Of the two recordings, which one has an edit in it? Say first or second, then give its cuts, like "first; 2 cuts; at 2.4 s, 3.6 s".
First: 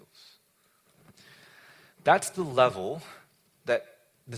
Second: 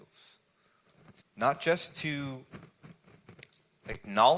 second; 1 cut; at 1.2 s